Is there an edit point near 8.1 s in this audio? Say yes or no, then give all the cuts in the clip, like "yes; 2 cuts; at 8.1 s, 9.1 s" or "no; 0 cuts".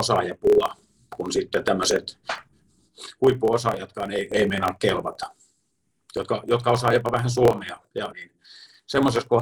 yes; 1 cut; at 8.1 s